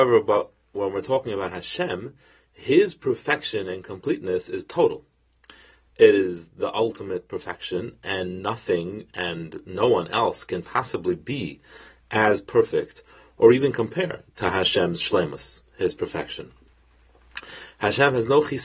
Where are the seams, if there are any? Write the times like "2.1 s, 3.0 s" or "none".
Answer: none